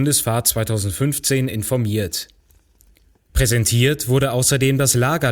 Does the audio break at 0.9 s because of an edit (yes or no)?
no